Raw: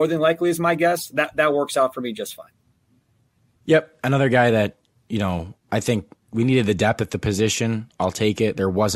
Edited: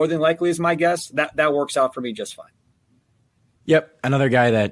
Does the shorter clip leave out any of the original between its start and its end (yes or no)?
no